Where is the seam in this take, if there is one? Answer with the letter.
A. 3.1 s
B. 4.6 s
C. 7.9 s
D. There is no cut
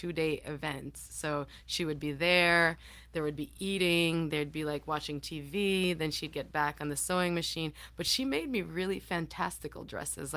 D